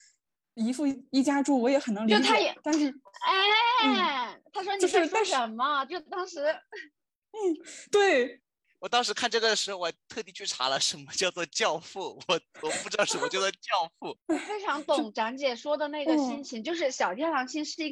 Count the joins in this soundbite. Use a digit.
0